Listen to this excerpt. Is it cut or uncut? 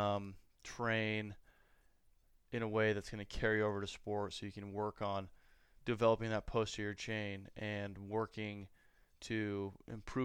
cut